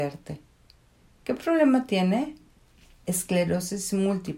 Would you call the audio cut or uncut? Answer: uncut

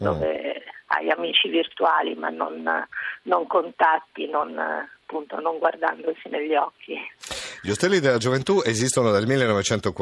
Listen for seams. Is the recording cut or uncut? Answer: uncut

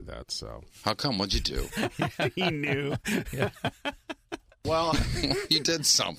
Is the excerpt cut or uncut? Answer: cut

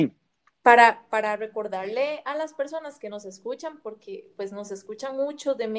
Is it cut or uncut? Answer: uncut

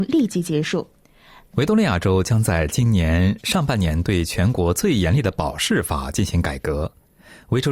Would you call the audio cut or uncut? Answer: cut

